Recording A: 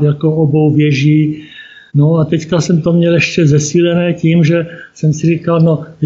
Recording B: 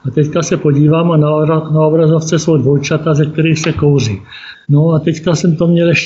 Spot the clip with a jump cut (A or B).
B